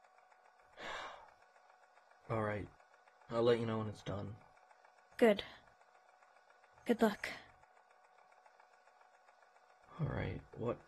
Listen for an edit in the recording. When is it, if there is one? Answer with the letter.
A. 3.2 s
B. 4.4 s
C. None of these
C